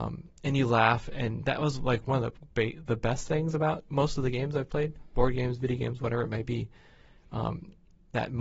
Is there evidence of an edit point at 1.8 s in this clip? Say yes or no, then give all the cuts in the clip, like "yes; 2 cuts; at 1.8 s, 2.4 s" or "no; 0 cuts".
no; 0 cuts